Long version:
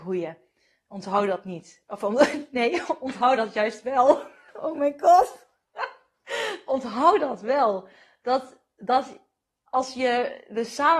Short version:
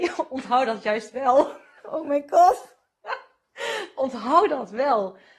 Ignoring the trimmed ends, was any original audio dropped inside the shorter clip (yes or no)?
no